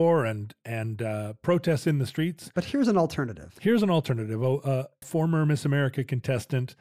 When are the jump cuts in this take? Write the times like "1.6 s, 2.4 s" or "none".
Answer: 5.0 s